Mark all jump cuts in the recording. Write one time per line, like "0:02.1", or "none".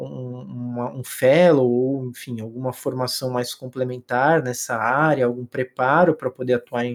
none